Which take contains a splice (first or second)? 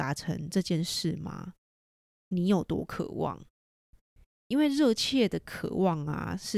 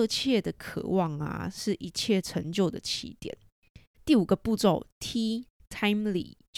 second